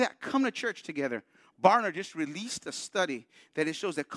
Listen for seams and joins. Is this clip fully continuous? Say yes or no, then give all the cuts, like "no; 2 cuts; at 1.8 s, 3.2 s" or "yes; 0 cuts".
yes; 0 cuts